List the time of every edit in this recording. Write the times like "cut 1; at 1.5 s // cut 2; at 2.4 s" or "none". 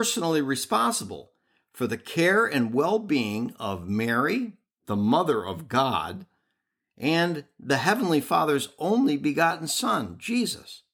none